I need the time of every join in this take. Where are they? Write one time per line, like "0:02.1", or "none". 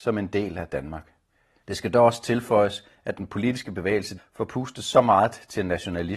0:01.6
0:04.2